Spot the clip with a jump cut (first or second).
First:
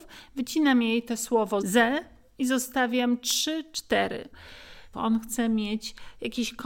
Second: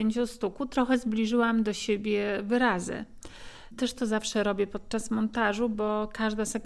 first